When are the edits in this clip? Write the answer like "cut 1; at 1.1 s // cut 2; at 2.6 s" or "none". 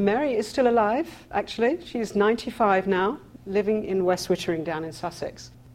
none